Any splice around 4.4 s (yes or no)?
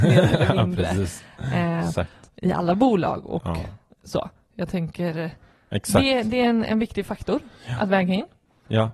no